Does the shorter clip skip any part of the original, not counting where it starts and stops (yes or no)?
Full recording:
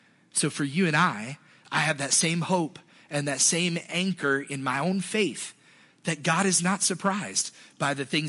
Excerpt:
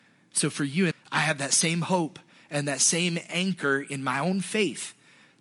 yes